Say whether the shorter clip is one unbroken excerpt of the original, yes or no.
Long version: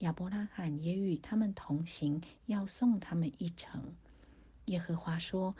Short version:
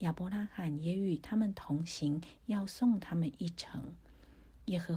yes